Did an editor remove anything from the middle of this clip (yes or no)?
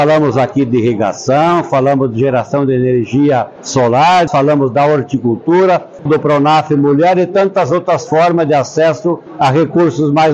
yes